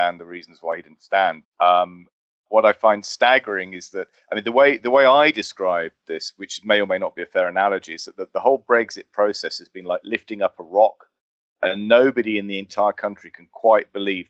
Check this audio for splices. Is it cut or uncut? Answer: cut